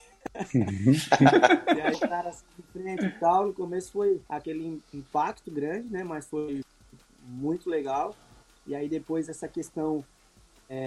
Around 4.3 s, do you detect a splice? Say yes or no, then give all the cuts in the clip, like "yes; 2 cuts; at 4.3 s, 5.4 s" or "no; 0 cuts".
yes; 1 cut; at 4.3 s